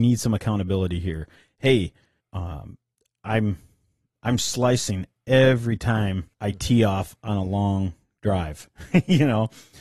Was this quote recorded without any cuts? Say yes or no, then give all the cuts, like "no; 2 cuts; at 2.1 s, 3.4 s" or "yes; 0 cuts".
no; 2 cuts; at 2.2 s, 6.3 s